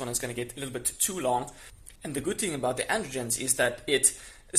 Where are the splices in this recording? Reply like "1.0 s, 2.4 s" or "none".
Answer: 2.0 s